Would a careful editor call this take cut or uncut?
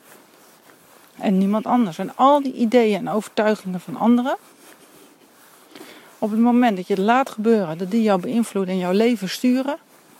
uncut